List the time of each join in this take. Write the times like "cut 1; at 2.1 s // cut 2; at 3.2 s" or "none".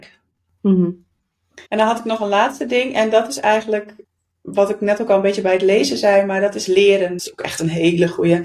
cut 1; at 1.7 s // cut 2; at 7.2 s